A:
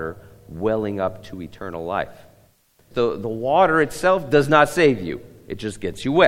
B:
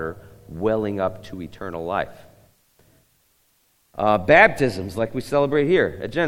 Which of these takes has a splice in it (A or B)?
A